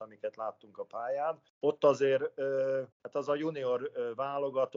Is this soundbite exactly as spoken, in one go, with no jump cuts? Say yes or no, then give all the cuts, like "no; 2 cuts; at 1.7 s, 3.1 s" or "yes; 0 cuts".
no; 2 cuts; at 1.5 s, 2.9 s